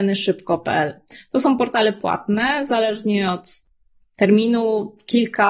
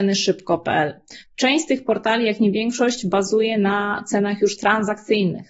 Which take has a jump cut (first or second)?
second